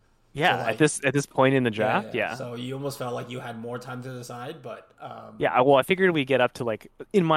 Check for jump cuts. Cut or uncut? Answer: uncut